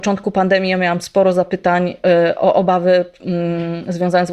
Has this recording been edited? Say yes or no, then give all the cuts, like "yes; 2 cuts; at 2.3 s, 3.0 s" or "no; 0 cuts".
no; 0 cuts